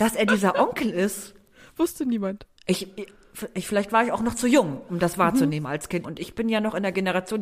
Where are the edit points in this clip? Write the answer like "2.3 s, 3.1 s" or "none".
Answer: 2.5 s, 6.0 s